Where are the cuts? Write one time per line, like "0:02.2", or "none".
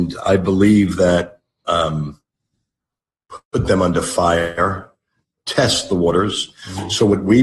none